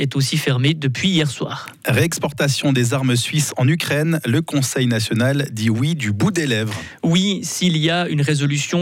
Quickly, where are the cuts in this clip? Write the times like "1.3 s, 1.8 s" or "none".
none